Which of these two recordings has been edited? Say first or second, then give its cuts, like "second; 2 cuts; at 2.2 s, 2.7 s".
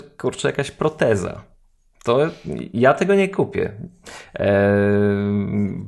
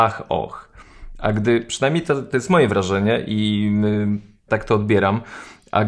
second; 1 cut; at 4.5 s